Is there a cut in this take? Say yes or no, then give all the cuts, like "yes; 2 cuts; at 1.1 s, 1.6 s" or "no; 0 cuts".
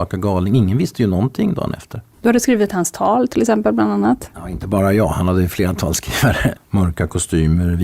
yes; 2 cuts; at 2.1 s, 6.6 s